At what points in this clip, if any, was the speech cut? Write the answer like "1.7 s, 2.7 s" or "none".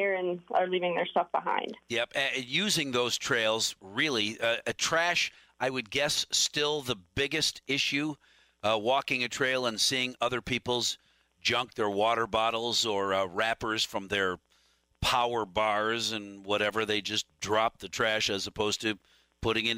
1.8 s

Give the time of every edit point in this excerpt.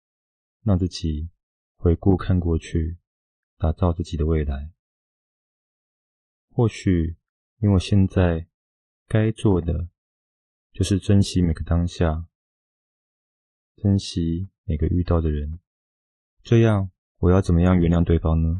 16.2 s

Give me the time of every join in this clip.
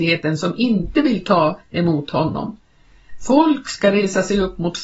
none

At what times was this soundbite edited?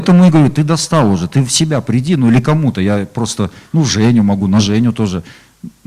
none

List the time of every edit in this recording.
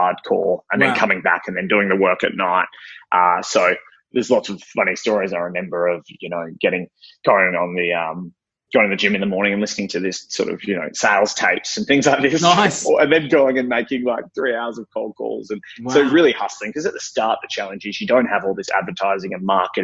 none

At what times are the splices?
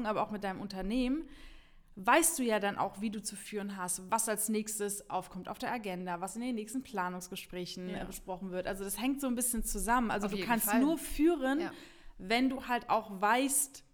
4.1 s

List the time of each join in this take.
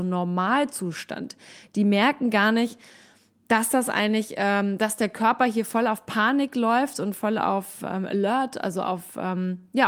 none

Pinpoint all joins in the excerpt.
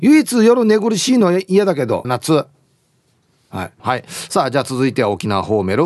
2.0 s, 3.8 s

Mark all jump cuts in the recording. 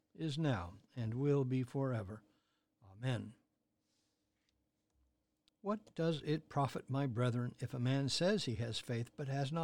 5.5 s

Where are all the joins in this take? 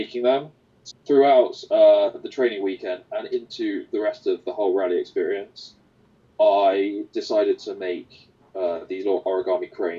0.9 s

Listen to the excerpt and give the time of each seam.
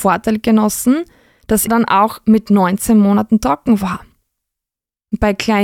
1.7 s

